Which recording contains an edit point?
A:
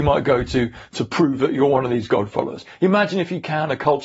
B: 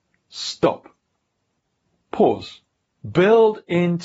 B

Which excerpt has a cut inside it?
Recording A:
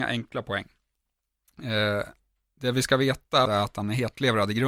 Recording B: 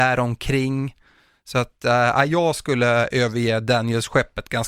A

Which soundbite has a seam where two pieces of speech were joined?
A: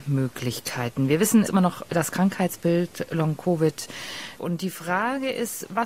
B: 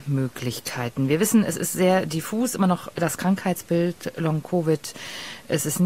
A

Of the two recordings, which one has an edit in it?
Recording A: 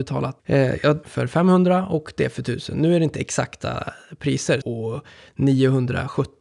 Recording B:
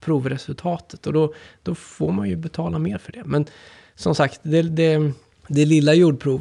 A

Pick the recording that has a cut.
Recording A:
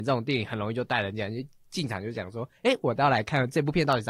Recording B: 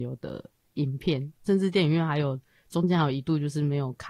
B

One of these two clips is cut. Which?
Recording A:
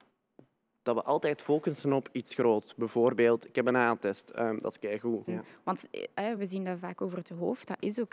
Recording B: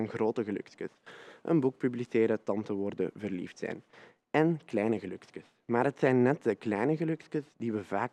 A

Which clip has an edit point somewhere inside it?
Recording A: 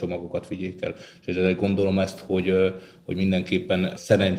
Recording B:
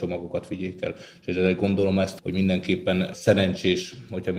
B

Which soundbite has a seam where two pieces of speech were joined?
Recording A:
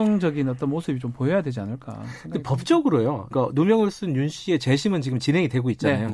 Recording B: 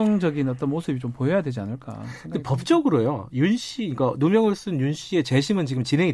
A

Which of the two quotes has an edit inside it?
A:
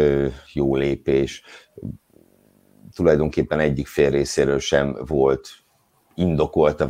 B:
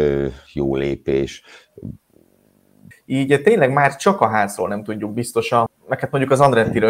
B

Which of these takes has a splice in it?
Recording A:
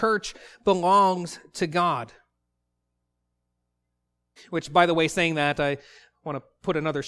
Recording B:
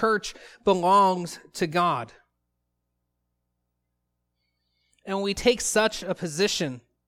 A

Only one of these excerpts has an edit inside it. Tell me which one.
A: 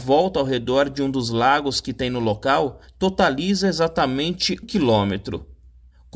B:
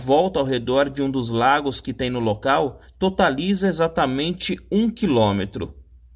A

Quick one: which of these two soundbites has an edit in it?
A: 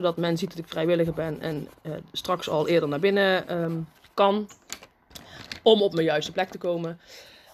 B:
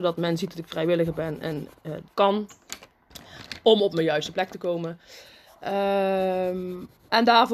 B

